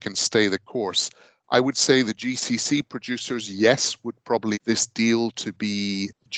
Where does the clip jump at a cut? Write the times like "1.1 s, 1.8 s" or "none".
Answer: 4.5 s